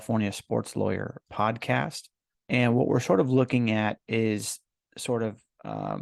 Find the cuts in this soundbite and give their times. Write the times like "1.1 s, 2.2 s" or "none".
2.3 s

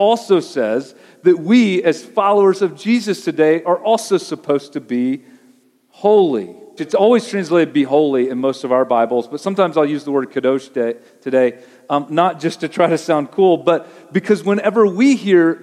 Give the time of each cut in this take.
6.8 s

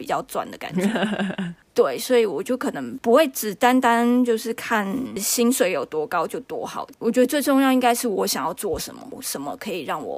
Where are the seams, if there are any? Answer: none

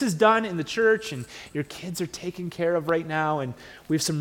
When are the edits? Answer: none

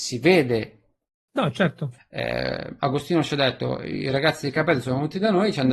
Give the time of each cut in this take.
2.0 s

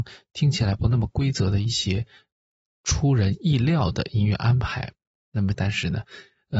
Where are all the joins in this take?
5.5 s

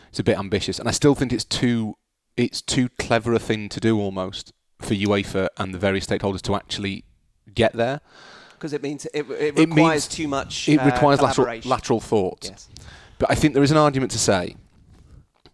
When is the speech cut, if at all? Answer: none

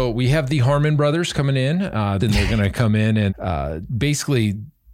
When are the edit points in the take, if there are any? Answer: 2.2 s, 3.3 s

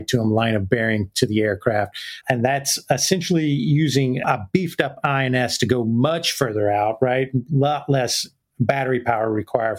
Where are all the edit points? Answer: 2.2 s

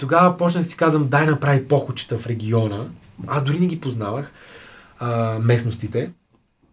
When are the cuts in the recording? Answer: none

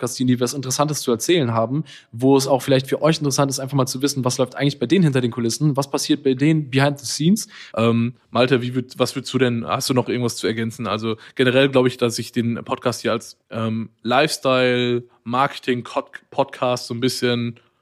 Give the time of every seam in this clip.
7.7 s, 13.4 s

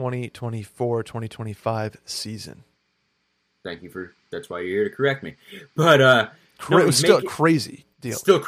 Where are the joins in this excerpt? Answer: none

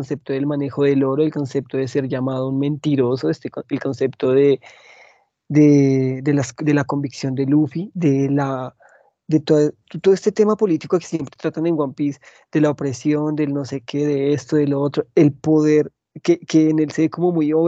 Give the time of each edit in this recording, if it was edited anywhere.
none

